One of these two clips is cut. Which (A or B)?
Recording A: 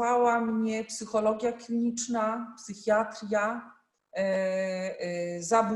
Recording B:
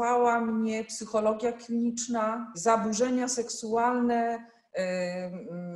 B